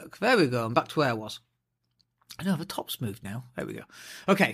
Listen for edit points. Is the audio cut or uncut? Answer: uncut